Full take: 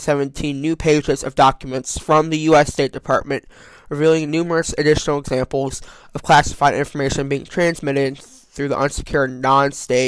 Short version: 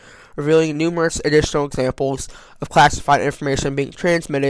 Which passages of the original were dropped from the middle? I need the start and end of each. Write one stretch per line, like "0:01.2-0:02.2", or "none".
none